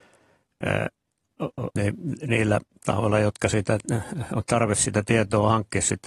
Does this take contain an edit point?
yes; 1 cut; at 1.8 s

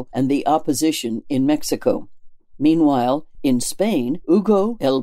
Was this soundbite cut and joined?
no; 0 cuts

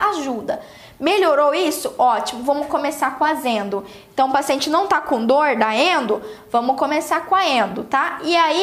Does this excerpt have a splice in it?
no; 0 cuts

